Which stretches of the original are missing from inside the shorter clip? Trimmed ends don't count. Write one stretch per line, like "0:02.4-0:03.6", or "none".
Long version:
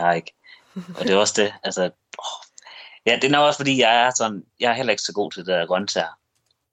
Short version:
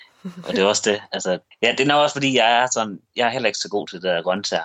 0:02.0-0:02.9